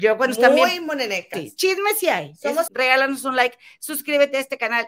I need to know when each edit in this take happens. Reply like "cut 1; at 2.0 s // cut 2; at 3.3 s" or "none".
cut 1; at 1.3 s // cut 2; at 2.7 s